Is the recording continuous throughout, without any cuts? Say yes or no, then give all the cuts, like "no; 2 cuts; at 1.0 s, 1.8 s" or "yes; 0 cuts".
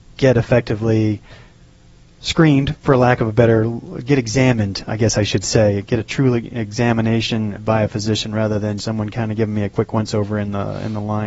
no; 2 cuts; at 7.6 s, 8.8 s